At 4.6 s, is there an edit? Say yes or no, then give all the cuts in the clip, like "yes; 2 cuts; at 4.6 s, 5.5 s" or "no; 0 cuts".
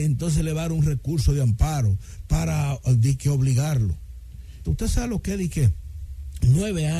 yes; 1 cut; at 4.6 s